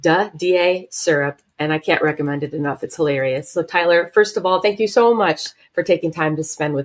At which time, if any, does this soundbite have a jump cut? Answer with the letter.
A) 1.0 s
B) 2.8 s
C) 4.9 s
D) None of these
D